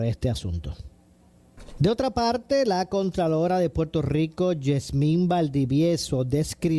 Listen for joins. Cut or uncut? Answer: cut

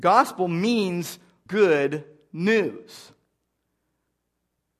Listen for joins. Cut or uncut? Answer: cut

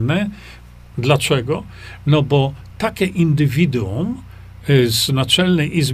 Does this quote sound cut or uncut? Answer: cut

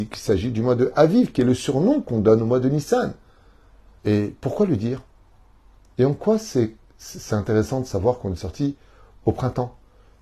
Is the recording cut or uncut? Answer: cut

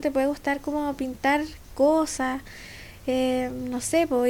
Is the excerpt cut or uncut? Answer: uncut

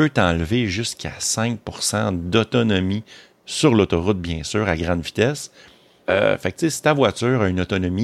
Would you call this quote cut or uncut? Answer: cut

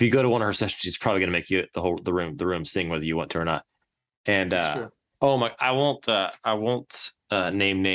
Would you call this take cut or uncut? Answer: uncut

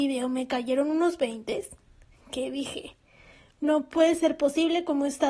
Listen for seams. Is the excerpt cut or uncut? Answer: uncut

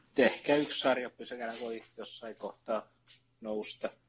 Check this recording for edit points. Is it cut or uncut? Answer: uncut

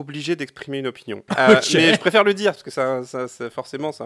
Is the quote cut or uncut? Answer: cut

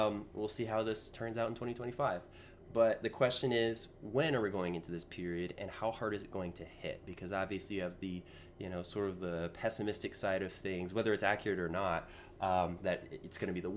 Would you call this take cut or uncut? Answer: uncut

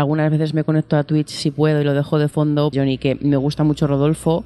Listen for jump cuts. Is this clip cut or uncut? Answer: cut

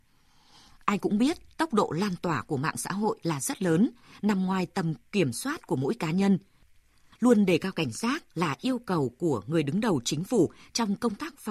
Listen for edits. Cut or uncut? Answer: cut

